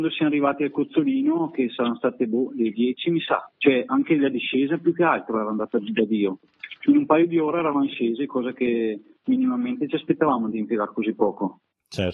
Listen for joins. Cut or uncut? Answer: uncut